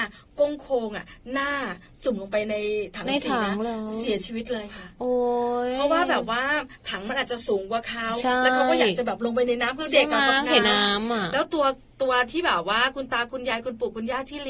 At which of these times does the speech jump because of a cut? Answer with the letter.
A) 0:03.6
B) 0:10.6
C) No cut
B